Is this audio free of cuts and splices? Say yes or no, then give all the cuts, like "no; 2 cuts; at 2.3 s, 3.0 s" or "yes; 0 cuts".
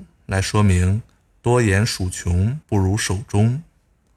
no; 1 cut; at 2.6 s